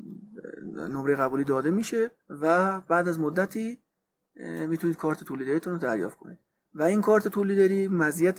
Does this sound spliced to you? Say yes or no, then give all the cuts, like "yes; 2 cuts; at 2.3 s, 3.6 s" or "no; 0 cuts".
yes; 1 cut; at 2.2 s